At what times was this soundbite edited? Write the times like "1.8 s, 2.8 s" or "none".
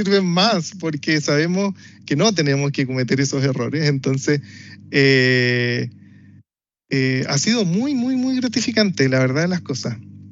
none